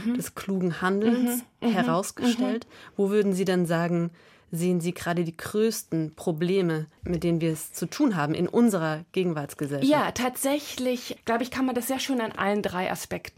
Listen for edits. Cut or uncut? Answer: uncut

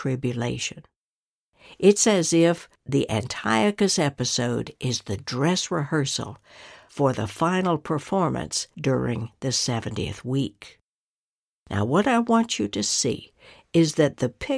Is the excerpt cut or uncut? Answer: uncut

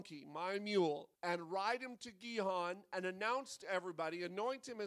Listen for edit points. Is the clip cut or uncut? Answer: cut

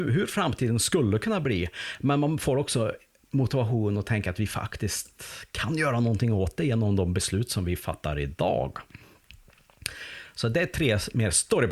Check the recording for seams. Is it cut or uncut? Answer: uncut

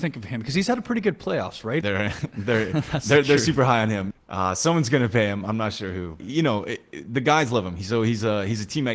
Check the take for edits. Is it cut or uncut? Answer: cut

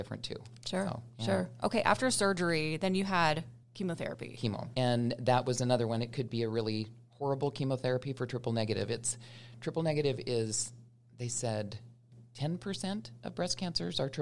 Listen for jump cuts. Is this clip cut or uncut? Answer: cut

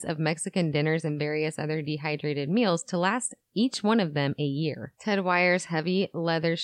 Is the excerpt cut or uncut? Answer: cut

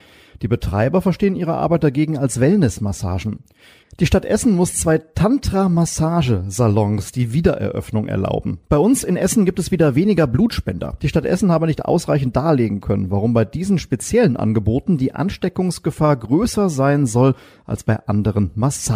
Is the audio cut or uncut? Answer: cut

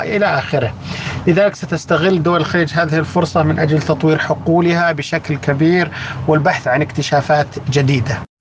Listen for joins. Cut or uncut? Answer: uncut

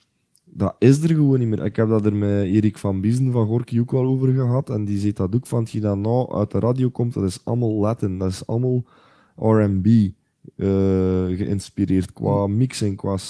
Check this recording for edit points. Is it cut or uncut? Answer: uncut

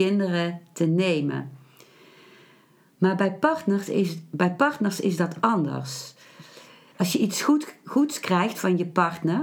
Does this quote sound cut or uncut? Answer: cut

